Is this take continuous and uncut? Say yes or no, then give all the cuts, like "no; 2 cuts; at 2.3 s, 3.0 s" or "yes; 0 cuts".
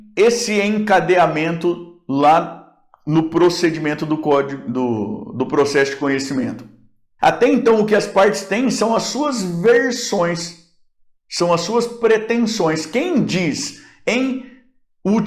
no; 1 cut; at 7.2 s